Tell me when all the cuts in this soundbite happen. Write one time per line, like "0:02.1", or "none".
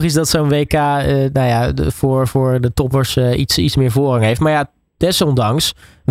none